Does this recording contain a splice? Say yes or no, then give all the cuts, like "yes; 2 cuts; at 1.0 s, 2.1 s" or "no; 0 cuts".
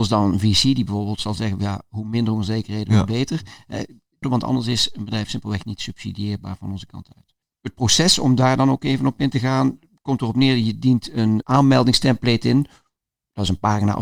yes; 1 cut; at 4.2 s